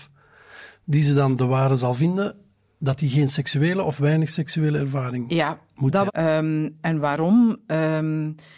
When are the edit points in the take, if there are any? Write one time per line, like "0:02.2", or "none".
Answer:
0:06.1